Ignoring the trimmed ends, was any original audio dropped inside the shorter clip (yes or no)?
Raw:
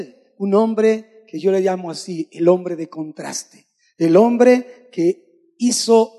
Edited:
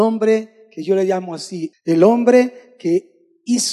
yes